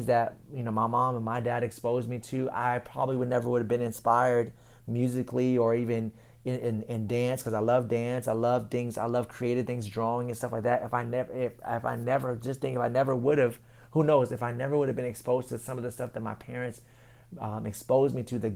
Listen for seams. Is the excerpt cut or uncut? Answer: uncut